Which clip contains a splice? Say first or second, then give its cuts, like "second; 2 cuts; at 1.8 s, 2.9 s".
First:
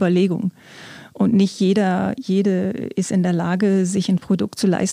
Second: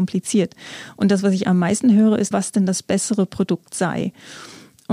second; 1 cut; at 2.3 s